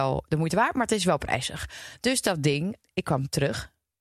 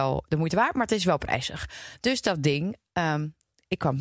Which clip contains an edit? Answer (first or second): first